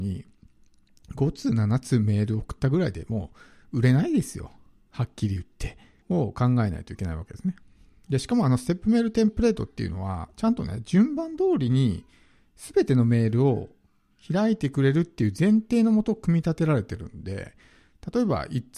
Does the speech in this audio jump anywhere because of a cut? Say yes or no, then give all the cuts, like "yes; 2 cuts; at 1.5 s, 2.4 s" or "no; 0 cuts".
yes; 1 cut; at 6.0 s